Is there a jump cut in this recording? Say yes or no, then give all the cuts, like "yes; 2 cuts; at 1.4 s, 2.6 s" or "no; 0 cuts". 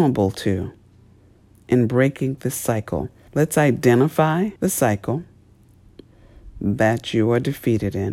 yes; 2 cuts; at 3.3 s, 4.6 s